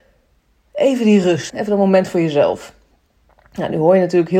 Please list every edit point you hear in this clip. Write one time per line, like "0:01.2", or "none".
0:01.5